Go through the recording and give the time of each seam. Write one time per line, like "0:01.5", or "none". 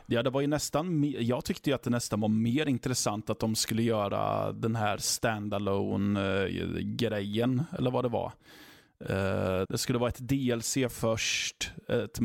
0:09.7